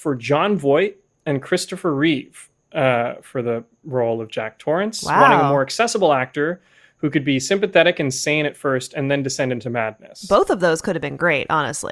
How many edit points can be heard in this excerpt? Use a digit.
0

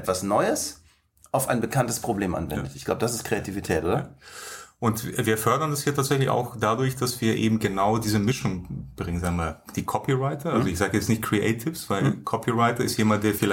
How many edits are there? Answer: 0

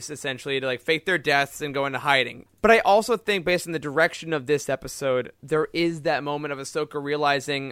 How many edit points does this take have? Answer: 1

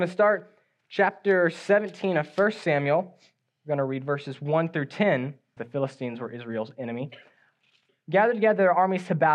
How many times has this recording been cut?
1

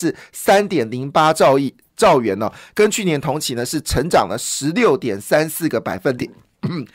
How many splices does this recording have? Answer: 0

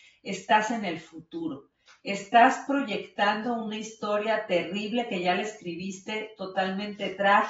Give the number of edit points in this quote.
0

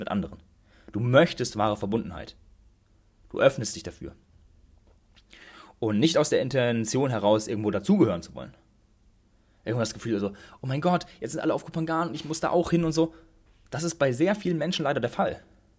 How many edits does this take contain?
0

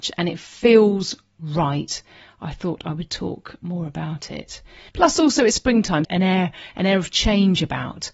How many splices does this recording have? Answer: 2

